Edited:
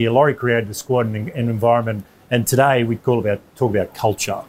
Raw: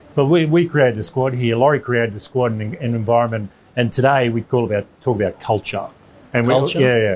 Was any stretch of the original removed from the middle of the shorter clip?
no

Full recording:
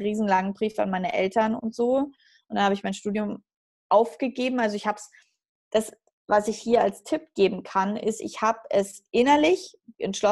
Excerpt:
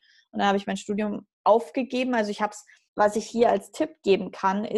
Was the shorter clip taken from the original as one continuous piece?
no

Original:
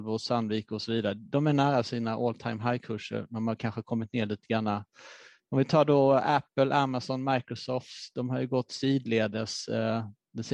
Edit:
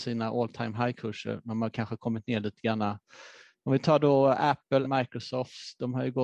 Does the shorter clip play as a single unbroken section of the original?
no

